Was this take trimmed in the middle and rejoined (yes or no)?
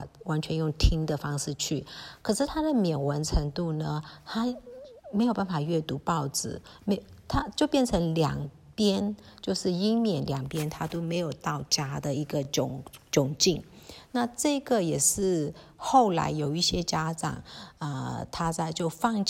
no